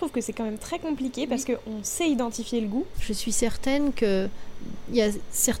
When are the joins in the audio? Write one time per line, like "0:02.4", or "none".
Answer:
0:02.9

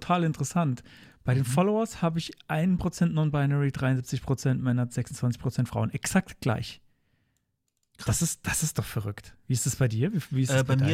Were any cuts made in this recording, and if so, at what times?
none

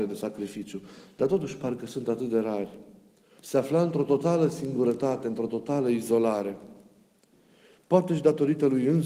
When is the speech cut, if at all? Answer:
0:03.4

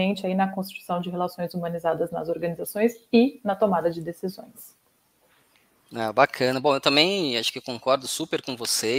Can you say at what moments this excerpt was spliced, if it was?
none

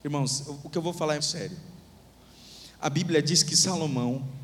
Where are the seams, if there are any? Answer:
0:01.2

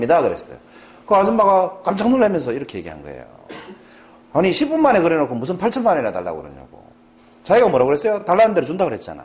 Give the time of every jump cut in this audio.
none

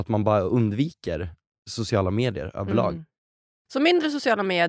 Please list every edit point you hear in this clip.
none

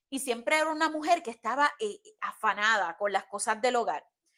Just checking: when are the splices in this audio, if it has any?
0:02.2

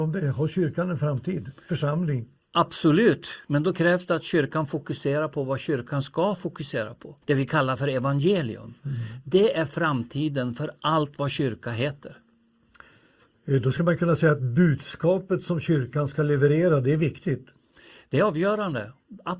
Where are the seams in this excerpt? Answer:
0:07.2

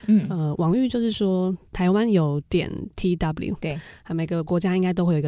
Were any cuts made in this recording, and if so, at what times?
none

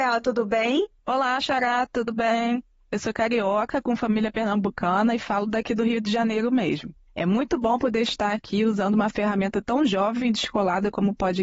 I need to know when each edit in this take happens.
0:01.0

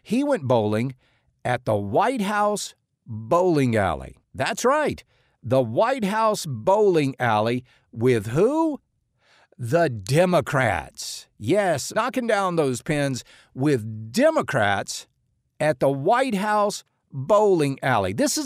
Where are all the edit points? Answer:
0:04.2
0:11.9

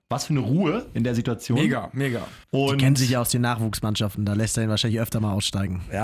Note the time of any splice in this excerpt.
0:02.4

